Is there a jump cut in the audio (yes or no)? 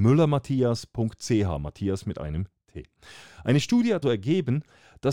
yes